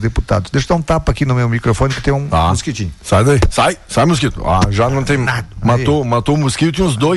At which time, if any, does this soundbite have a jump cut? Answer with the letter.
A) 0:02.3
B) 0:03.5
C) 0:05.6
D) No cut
C